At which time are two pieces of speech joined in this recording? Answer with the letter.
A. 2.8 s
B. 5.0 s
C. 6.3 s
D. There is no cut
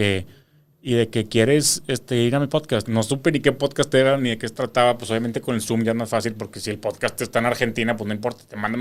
A